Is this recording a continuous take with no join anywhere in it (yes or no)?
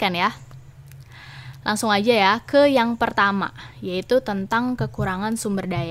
yes